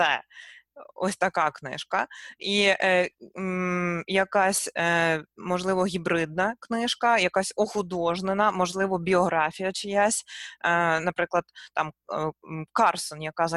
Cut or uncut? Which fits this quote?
uncut